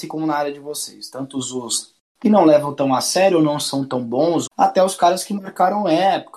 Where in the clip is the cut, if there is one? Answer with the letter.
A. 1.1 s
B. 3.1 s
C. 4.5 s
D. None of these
C